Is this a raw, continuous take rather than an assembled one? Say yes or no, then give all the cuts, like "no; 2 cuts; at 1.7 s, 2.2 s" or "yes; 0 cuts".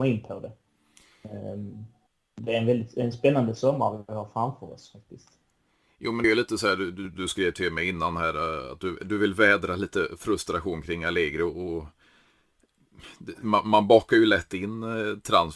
yes; 0 cuts